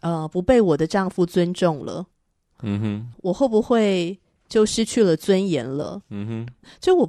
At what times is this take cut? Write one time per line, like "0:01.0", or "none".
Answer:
none